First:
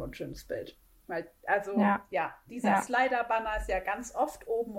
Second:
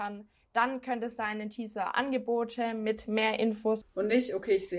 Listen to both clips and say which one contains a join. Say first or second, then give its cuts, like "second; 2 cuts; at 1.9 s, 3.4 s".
second; 1 cut; at 3.8 s